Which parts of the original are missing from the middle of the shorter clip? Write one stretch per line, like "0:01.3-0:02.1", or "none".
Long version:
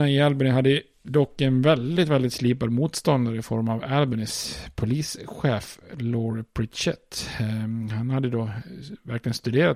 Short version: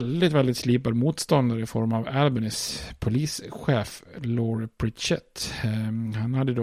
none